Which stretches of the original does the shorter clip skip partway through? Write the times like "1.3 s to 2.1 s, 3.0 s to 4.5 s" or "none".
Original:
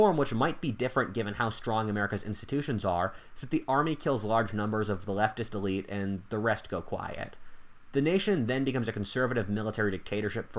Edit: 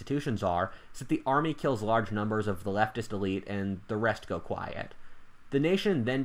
none